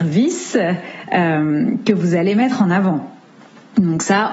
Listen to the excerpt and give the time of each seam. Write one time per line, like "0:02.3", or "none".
none